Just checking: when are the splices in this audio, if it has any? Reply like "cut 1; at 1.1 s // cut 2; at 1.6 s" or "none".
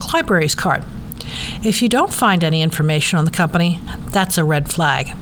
none